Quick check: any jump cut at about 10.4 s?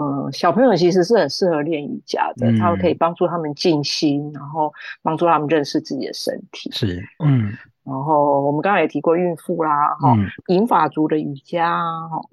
yes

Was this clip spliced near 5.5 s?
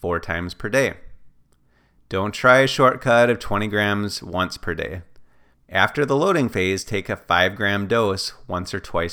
yes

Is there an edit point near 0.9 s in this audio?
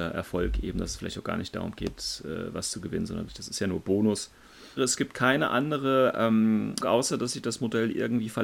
no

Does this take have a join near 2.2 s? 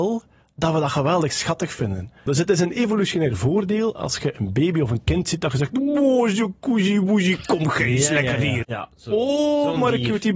no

